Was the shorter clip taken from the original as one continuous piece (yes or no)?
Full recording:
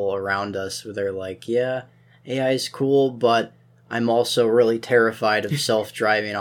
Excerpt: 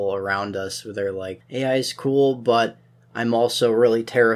no